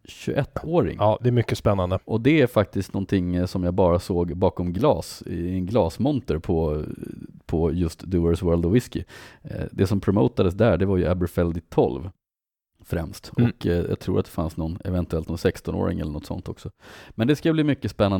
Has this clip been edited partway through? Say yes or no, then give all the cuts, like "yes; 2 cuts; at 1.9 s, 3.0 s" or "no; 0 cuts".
no; 0 cuts